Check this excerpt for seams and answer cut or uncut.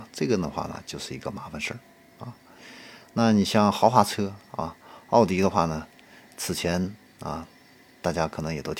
uncut